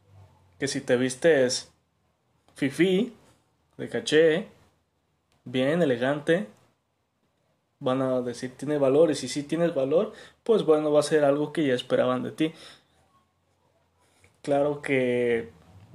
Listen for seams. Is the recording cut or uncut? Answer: uncut